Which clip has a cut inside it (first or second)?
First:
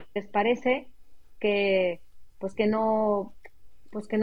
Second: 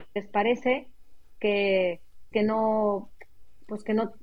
second